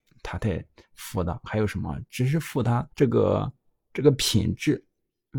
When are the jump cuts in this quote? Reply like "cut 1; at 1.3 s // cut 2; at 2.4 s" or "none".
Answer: cut 1; at 1.4 s // cut 2; at 2.9 s